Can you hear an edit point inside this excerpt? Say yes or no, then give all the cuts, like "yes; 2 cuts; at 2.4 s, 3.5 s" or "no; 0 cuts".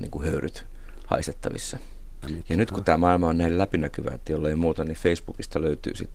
yes; 1 cut; at 2.2 s